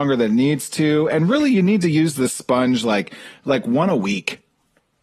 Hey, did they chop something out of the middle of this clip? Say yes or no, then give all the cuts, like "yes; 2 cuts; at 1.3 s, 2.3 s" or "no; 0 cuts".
no; 0 cuts